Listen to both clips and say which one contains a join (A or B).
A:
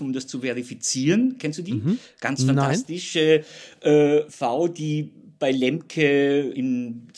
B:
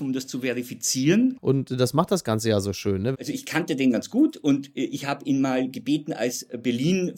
B